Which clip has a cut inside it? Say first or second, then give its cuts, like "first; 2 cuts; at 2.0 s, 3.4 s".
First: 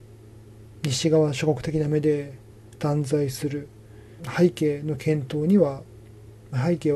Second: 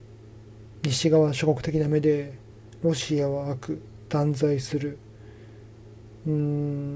first; 2 cuts; at 2.8 s, 4.2 s